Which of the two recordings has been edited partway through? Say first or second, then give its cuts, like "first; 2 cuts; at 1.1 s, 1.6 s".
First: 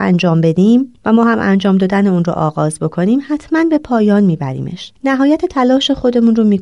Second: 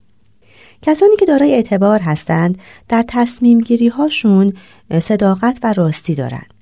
first; 2 cuts; at 1.0 s, 5.0 s